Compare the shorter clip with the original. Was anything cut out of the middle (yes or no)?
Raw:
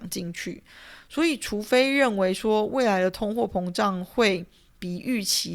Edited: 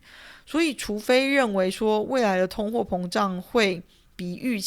no